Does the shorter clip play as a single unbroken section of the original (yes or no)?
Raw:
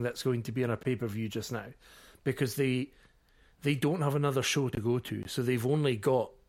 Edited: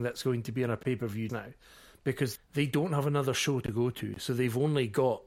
no